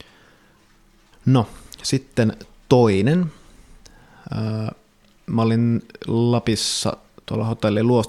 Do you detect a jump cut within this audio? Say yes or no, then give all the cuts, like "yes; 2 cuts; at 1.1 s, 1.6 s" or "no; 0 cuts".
yes; 1 cut; at 1.1 s